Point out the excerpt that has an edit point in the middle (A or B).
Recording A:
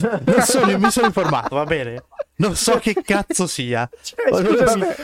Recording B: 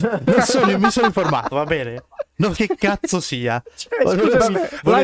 B